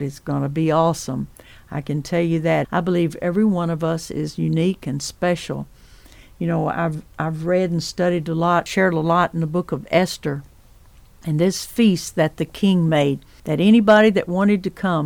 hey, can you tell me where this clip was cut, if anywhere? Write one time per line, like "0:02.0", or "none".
0:02.6